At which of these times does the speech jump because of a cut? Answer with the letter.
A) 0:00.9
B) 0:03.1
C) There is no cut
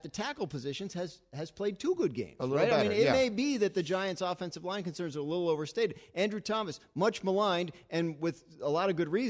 C